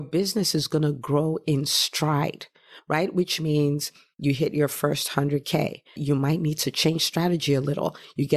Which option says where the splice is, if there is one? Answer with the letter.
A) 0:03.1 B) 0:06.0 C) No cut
B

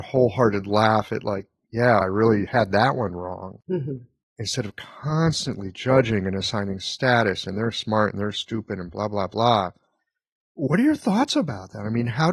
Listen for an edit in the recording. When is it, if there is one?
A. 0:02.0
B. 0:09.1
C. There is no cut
A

